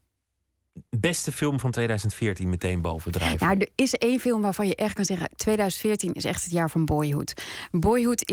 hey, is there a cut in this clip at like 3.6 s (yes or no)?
no